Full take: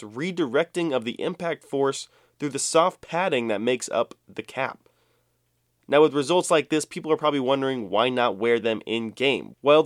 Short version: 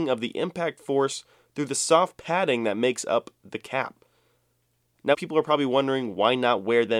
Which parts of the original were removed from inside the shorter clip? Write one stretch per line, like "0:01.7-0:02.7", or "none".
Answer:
0:06.0-0:06.9